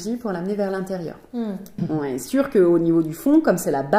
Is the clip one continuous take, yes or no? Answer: no